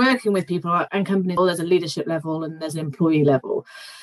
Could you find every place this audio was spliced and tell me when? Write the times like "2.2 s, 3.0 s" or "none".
1.4 s